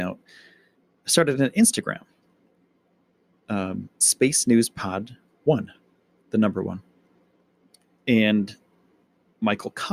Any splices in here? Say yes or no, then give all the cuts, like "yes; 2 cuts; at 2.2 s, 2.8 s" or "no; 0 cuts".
no; 0 cuts